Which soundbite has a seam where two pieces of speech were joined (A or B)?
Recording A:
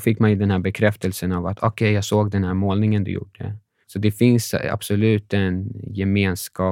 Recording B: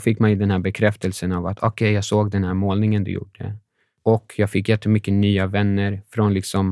A